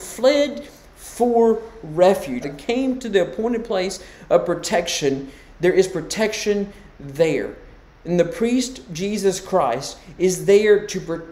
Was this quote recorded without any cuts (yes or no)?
no